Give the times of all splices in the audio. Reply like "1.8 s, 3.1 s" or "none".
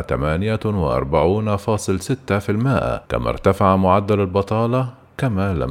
3.1 s